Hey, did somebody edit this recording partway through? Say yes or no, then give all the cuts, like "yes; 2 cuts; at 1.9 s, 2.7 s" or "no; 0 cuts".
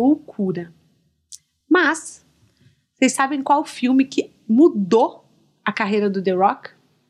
no; 0 cuts